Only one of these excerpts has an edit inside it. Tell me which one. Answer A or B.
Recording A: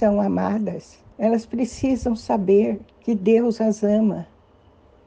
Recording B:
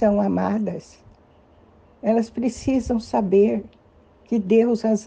A